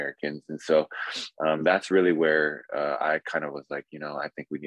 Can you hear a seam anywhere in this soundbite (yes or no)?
no